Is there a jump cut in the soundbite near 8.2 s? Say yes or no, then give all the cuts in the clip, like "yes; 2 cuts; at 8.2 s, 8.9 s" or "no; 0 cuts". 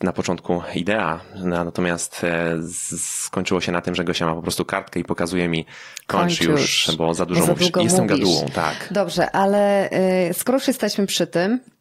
no; 0 cuts